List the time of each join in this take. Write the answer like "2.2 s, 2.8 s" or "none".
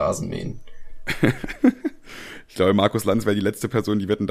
none